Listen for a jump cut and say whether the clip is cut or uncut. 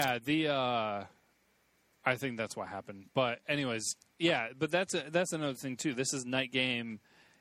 uncut